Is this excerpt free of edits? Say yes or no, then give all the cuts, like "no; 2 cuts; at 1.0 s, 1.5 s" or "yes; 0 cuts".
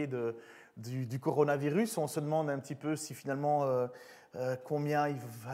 yes; 0 cuts